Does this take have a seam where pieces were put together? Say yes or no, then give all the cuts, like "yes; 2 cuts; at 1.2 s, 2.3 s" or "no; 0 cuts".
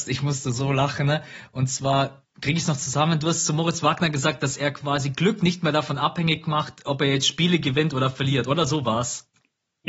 yes; 1 cut; at 2.3 s